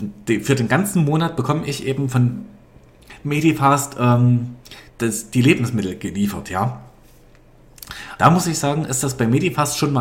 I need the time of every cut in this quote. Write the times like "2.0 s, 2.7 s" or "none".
4.9 s, 8.2 s